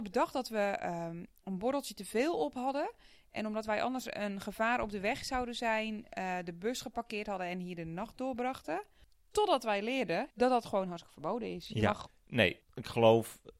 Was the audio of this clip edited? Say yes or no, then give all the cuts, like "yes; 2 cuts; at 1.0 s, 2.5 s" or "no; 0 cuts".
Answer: yes; 2 cuts; at 10.3 s, 12.1 s